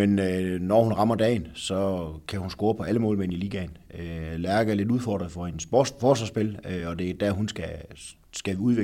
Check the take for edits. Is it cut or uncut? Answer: uncut